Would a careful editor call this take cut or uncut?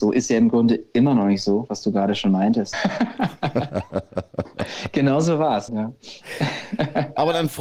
cut